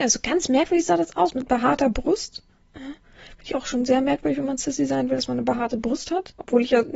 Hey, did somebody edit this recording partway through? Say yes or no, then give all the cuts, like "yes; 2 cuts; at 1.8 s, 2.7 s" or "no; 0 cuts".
no; 0 cuts